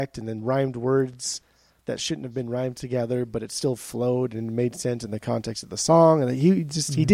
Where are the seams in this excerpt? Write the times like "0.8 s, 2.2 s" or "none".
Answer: none